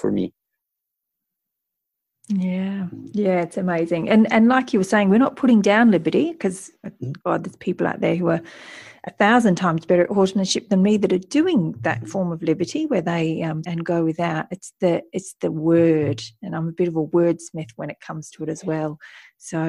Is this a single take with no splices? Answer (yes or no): no